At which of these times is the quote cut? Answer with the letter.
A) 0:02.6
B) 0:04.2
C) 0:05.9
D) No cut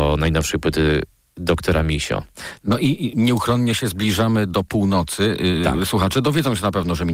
A